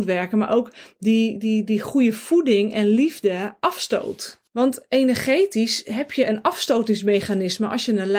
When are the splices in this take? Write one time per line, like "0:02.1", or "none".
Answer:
0:04.5